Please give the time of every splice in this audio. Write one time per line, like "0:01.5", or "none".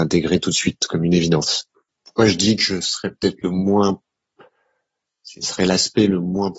0:01.9